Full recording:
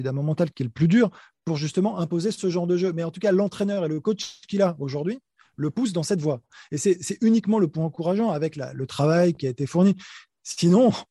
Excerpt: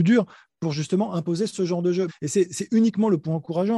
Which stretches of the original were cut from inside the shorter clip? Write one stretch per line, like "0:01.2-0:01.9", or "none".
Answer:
0:02.9-0:06.6